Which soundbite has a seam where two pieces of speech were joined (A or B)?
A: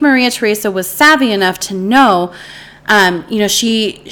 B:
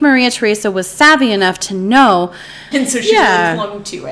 B